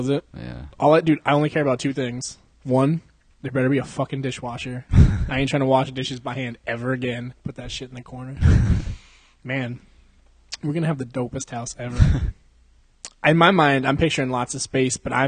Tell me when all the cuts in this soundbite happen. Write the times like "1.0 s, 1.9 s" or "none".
7.3 s